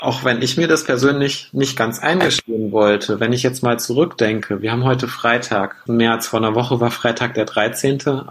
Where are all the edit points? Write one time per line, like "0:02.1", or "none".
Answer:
0:05.9